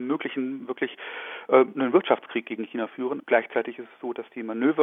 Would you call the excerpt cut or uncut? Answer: cut